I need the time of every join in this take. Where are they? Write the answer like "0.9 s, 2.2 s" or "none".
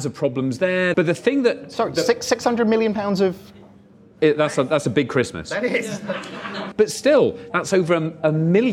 0.9 s, 6.7 s